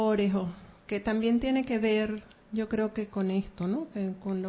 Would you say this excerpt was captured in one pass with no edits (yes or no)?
yes